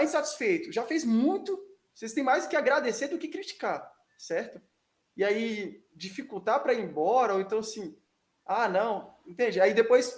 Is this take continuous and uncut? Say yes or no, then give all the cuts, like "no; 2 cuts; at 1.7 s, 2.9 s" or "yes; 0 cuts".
yes; 0 cuts